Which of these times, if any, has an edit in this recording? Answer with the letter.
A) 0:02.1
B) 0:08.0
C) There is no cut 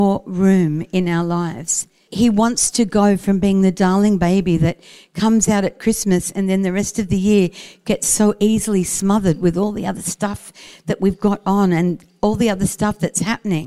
A